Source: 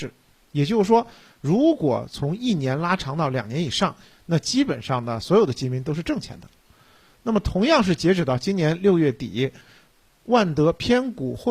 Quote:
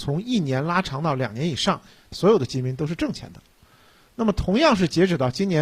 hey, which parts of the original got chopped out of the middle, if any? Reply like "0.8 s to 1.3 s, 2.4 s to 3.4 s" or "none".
4.3 s to 5.2 s